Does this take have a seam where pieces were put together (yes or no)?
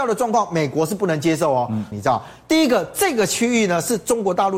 yes